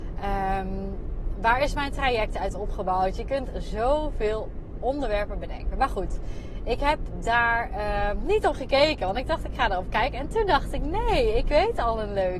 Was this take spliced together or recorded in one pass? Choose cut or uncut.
uncut